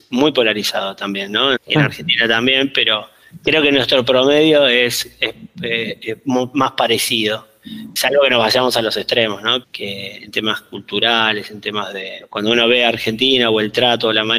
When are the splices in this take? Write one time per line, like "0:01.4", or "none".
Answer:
0:01.6
0:09.6